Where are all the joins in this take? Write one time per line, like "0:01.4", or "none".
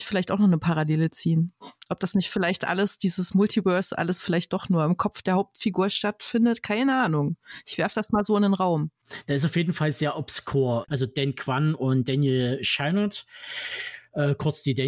0:10.9